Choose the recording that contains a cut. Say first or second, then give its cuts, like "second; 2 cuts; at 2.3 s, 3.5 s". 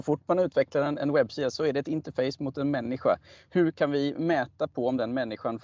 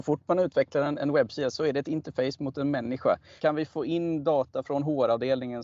second; 2 cuts; at 3.4 s, 4.6 s